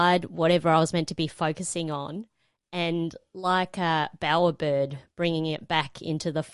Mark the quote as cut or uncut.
uncut